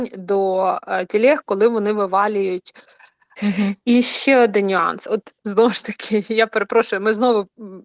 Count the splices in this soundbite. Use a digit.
2